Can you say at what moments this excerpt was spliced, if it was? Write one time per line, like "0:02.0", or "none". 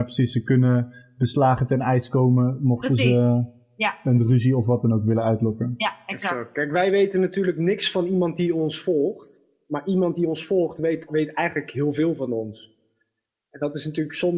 0:11.1